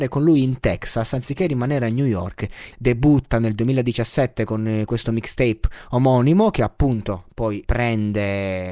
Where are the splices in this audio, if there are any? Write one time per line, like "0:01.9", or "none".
0:02.7
0:07.6